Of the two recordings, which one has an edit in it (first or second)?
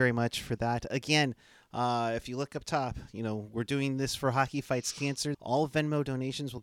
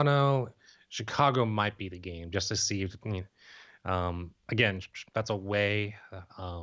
first